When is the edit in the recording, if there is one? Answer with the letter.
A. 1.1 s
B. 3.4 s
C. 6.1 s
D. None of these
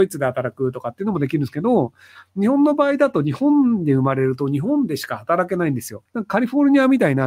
C